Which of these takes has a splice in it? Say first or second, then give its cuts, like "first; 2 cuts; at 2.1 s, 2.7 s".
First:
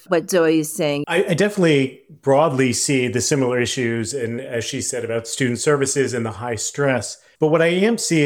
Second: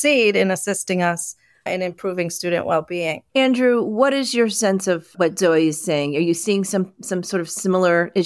first; 1 cut; at 1.0 s